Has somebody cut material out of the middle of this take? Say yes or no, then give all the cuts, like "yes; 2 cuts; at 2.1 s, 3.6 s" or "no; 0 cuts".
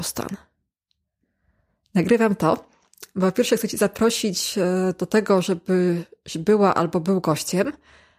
no; 0 cuts